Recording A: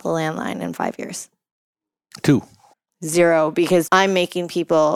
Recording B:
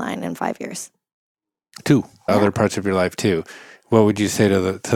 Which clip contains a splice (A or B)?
B